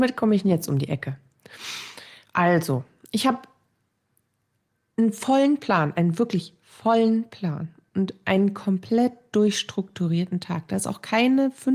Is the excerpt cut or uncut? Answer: uncut